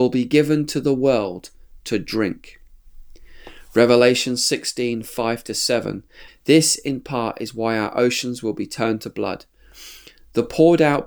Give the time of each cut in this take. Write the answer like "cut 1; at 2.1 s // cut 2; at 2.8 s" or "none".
cut 1; at 6.3 s

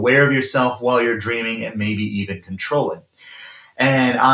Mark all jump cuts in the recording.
none

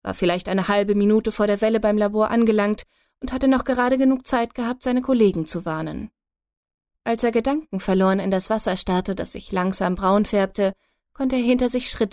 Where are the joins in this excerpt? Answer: cut 1; at 6.9 s

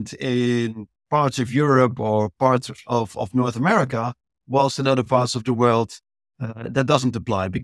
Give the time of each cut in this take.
none

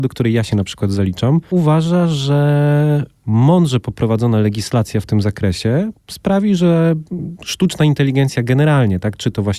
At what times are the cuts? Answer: none

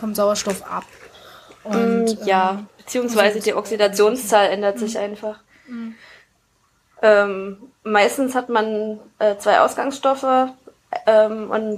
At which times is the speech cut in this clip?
none

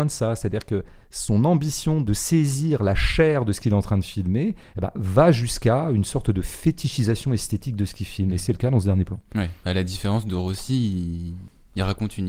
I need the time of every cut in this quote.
none

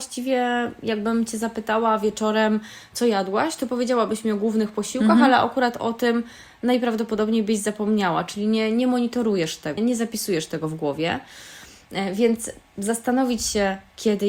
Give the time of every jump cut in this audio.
cut 1; at 9.8 s

